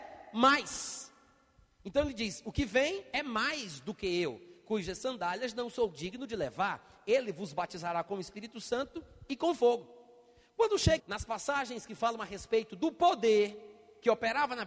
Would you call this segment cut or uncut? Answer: cut